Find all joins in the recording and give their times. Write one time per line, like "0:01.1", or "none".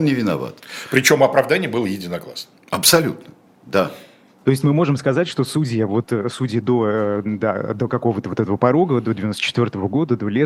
none